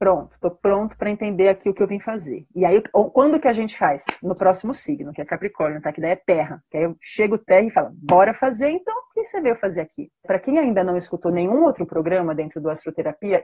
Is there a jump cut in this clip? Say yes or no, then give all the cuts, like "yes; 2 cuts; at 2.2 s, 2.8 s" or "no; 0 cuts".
yes; 1 cut; at 10.2 s